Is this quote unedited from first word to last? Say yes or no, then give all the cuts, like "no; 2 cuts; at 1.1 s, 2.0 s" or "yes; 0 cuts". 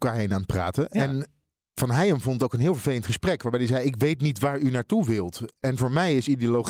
yes; 0 cuts